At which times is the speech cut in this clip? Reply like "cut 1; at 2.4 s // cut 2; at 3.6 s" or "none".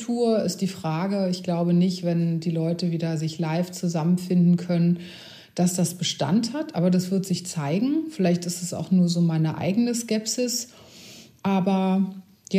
none